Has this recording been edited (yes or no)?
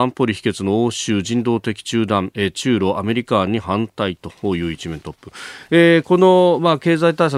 no